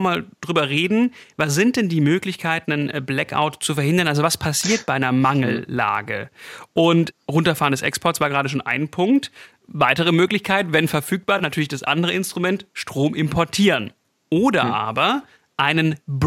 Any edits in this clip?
no; 0 cuts

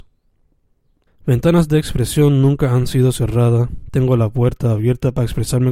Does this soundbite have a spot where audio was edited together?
yes; 1 cut; at 1.1 s

